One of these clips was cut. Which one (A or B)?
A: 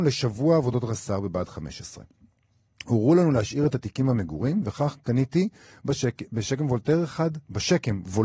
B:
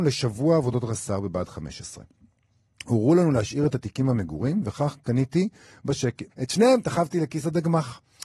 B